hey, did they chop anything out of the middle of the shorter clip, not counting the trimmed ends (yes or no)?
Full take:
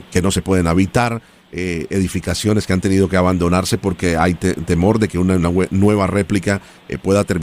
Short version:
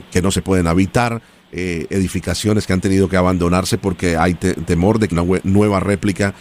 yes